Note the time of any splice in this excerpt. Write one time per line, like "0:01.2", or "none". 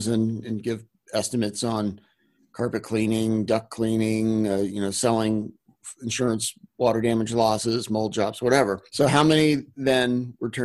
0:08.9